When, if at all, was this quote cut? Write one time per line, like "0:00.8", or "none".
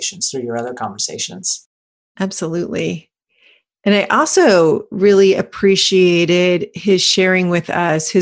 none